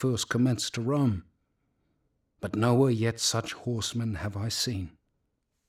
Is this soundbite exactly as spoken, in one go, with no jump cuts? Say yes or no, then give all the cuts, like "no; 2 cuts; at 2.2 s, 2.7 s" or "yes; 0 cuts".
yes; 0 cuts